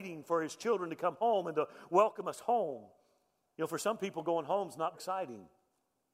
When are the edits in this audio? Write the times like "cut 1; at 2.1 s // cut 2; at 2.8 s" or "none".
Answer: cut 1; at 4.9 s

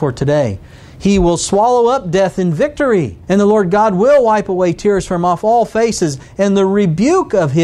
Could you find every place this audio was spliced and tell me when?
cut 1; at 3.2 s

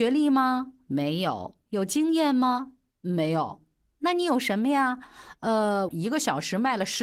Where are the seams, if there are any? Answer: cut 1; at 5.9 s

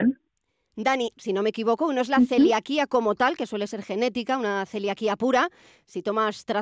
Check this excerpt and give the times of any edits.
cut 1; at 1.1 s

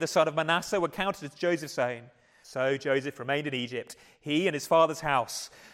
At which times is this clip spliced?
cut 1; at 2.4 s

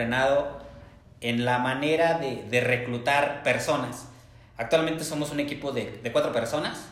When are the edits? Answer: none

